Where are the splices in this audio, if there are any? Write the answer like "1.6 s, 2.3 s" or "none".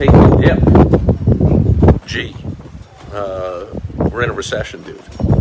none